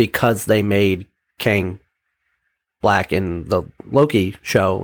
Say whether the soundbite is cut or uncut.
uncut